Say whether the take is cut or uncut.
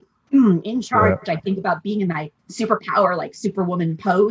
cut